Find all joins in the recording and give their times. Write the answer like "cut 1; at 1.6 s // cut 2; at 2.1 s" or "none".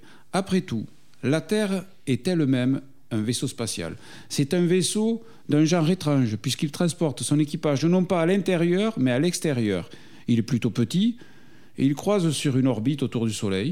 none